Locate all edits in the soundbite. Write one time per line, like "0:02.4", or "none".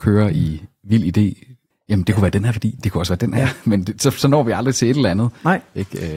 0:02.8